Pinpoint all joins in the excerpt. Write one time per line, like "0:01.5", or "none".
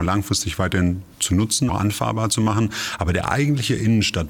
0:01.7